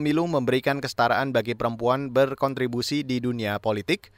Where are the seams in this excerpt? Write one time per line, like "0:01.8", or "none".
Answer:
none